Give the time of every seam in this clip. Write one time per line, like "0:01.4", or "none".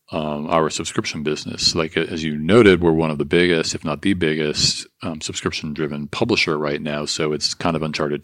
none